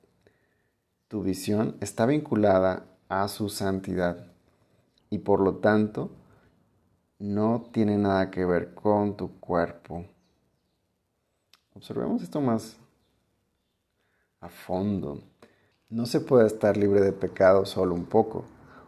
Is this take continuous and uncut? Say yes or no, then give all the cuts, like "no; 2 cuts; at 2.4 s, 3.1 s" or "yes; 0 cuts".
no; 2 cuts; at 5.0 s, 15.7 s